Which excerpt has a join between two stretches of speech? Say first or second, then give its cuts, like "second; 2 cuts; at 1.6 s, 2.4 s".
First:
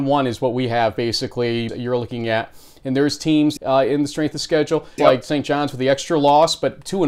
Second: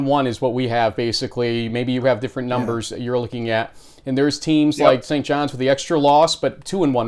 first; 3 cuts; at 1.7 s, 3.6 s, 5.0 s